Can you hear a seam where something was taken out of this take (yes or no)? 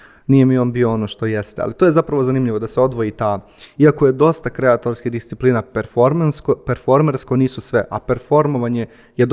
yes